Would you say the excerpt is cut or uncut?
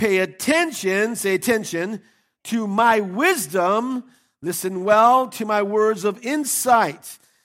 uncut